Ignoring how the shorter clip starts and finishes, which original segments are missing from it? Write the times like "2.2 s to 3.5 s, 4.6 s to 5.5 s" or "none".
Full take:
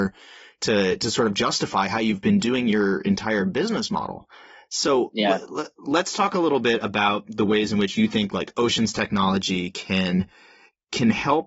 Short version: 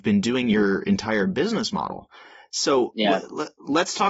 none